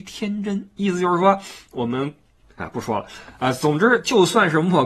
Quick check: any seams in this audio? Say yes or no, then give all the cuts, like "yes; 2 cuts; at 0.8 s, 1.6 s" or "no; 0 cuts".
no; 0 cuts